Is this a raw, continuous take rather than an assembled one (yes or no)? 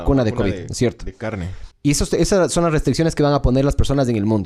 no